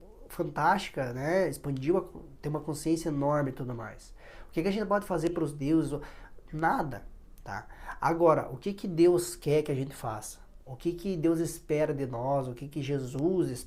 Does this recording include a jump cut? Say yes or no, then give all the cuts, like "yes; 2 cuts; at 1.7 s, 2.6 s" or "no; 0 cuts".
no; 0 cuts